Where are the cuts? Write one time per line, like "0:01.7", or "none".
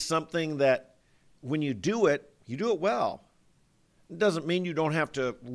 none